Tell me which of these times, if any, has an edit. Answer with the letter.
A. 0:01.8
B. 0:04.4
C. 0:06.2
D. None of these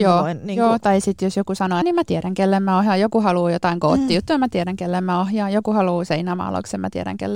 A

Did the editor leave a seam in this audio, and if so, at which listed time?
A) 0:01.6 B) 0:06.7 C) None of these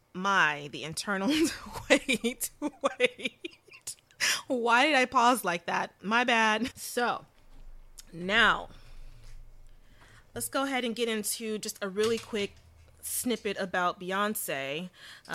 B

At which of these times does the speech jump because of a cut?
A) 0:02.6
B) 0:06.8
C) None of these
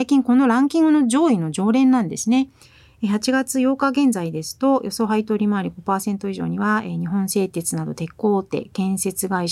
C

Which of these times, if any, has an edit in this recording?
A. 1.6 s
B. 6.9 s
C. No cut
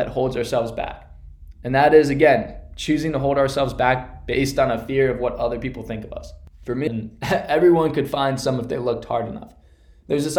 B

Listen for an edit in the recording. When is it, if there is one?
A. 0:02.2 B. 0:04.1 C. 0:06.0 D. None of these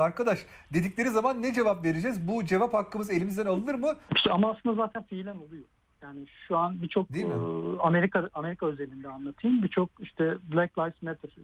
B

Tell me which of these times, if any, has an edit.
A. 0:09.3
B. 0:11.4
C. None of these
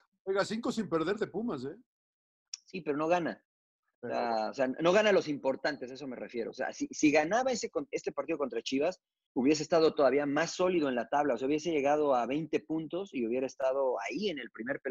A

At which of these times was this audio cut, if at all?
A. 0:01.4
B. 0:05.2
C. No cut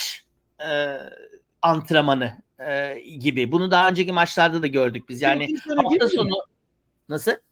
C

